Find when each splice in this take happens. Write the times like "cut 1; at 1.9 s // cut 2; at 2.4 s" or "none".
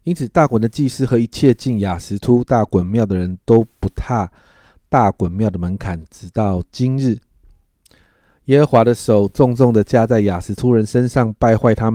none